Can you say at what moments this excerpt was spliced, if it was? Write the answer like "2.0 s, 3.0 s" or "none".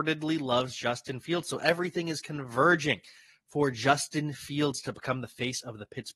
none